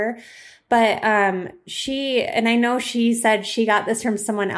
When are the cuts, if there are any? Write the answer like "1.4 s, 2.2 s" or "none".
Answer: none